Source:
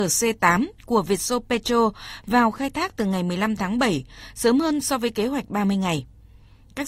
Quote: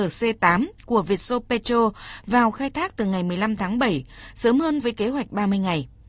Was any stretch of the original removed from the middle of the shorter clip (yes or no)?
yes